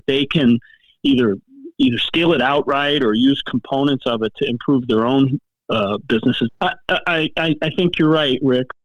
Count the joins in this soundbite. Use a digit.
1